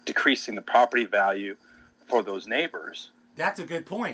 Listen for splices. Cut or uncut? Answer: uncut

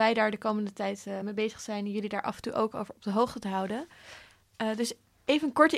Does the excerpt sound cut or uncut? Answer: uncut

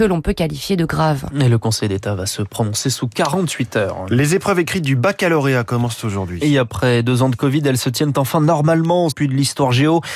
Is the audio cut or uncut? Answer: cut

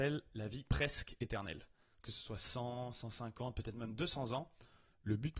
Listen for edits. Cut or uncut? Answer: uncut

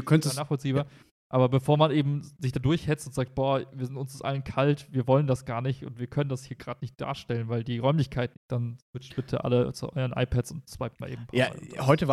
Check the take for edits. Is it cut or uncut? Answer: cut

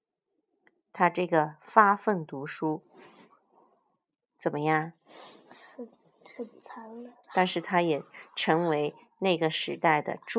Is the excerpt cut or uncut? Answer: cut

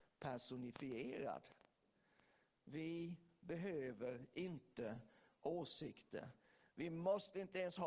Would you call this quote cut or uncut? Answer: uncut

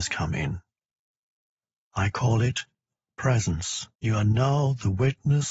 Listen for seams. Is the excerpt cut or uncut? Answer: cut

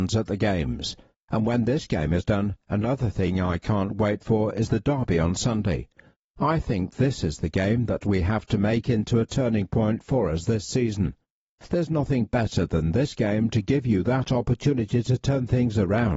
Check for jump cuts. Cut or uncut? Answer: cut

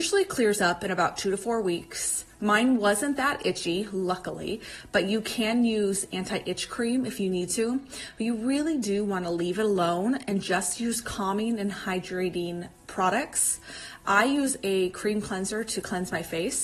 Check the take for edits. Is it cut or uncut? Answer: uncut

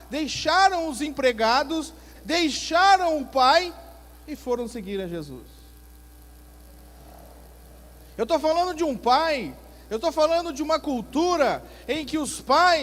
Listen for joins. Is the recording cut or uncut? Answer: cut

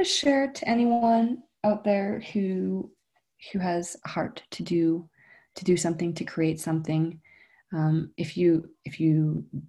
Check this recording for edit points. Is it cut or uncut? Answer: uncut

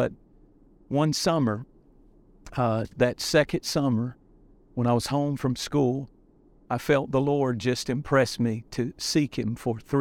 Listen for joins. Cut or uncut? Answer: uncut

